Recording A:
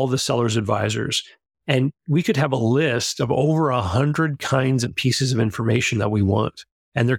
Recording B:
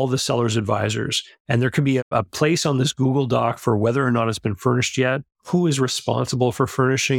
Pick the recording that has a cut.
B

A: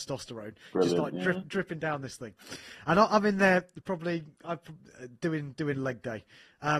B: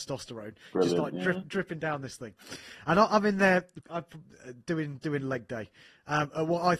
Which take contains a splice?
B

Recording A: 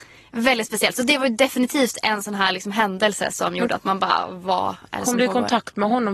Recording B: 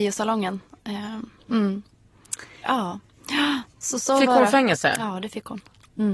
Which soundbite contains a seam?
B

